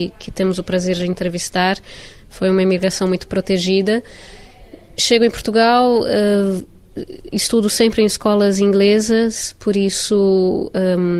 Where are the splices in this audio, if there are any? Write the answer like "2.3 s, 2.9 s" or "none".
none